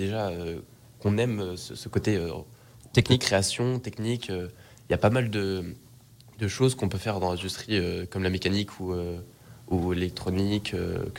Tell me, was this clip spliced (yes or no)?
no